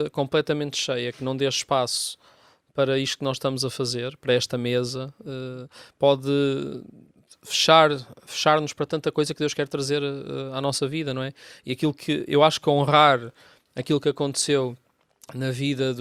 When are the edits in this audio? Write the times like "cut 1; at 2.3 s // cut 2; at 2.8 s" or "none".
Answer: none